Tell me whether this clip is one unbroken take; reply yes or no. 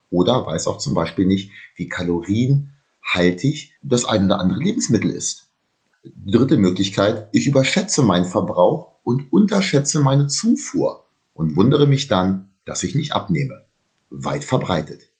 no